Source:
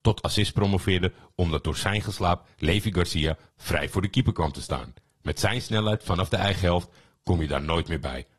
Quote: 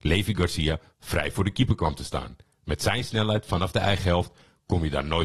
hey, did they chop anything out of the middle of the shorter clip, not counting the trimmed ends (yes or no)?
no